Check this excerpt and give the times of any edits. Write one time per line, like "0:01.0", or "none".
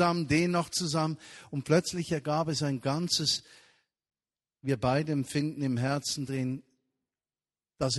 none